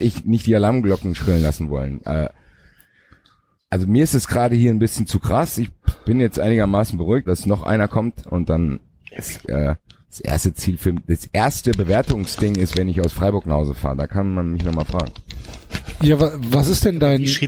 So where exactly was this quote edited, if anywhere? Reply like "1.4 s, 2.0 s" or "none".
7.3 s, 9.4 s, 12.7 s